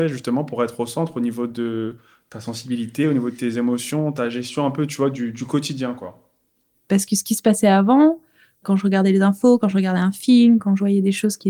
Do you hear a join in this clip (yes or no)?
yes